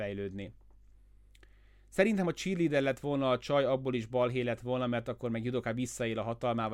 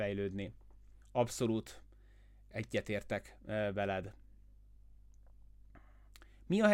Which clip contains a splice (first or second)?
second